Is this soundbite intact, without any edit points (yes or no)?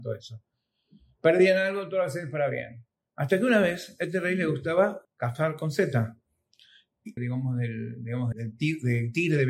no